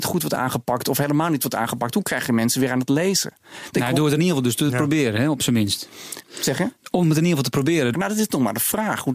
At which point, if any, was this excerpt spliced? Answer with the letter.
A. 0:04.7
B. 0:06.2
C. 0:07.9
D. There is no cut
C